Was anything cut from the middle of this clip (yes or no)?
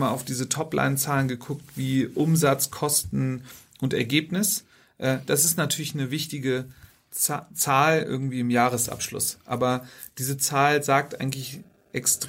no